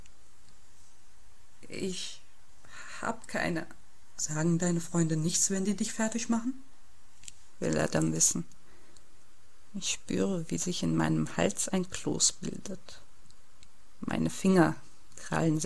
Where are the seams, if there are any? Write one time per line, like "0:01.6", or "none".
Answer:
0:04.2